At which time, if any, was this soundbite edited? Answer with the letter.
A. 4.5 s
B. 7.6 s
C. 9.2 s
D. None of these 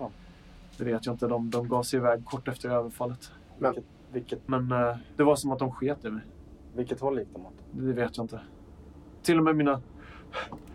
A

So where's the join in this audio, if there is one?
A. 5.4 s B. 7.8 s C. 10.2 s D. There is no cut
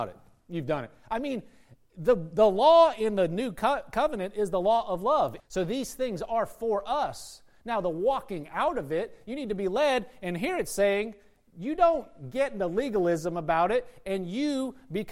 A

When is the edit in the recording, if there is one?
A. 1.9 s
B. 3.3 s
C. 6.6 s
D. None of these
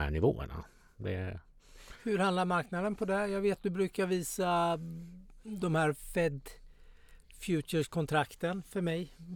D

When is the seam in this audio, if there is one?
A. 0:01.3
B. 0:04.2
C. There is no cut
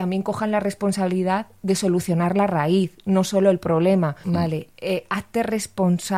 B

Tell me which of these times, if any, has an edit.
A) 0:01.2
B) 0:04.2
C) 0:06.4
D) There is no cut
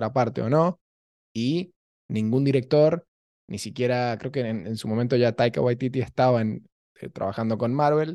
D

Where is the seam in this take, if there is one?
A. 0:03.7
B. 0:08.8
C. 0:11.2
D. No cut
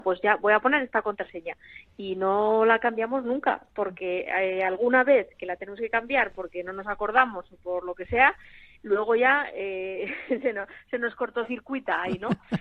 D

